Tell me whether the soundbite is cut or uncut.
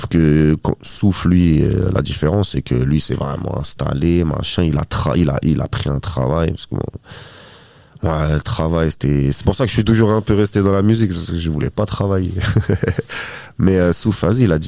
uncut